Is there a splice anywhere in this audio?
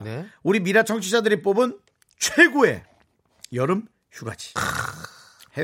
no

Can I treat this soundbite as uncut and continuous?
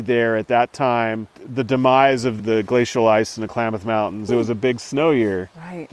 no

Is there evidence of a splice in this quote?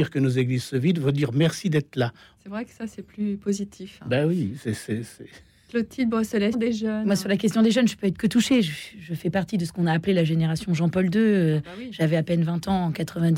yes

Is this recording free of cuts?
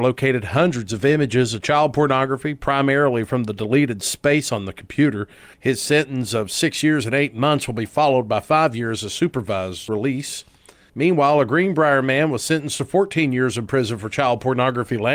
no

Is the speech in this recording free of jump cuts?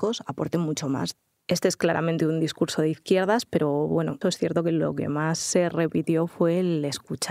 no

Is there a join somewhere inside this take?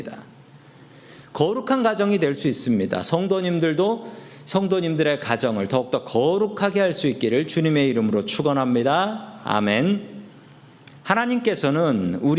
yes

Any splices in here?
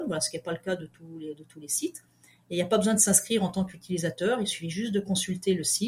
no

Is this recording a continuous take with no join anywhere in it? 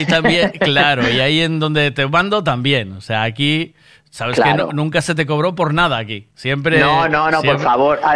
yes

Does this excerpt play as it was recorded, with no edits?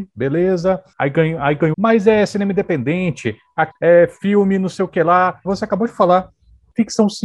no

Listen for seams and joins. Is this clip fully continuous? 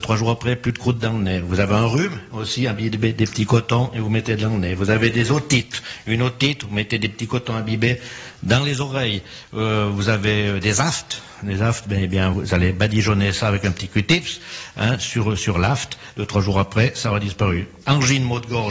no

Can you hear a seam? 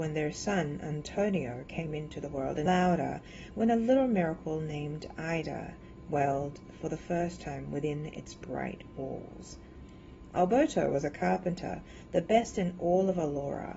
yes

